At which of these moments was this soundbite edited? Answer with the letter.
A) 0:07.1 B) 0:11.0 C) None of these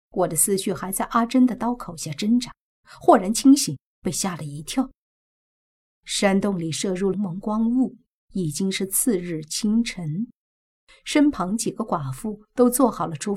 A